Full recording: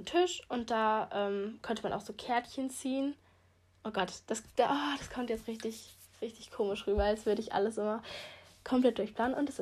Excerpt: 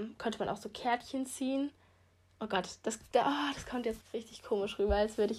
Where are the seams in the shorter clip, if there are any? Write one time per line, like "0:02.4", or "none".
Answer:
0:04.0